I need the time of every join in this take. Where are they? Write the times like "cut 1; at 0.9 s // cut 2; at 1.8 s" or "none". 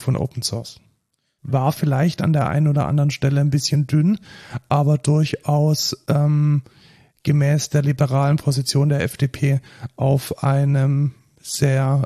cut 1; at 1.4 s